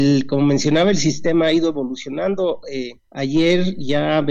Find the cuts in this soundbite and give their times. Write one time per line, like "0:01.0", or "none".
0:03.0

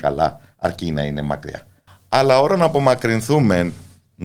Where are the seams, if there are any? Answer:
0:01.9

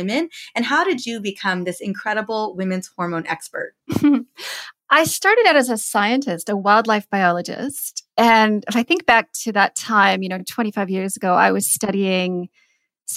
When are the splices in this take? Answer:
none

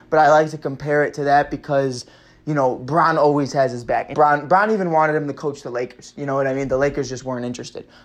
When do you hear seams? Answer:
0:04.1

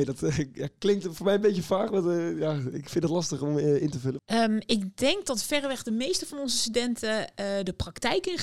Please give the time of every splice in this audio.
0:04.2

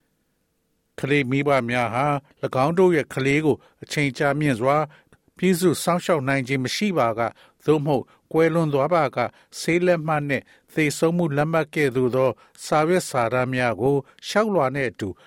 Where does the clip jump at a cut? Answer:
none

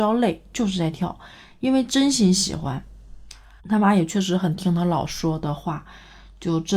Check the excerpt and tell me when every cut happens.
0:03.6

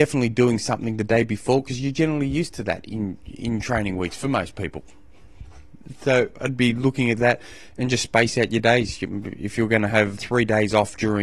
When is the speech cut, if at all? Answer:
0:10.2

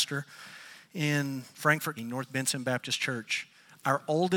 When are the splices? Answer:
0:02.0

